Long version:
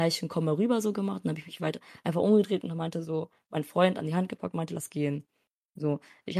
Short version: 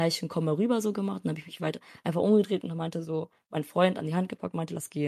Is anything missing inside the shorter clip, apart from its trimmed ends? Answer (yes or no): no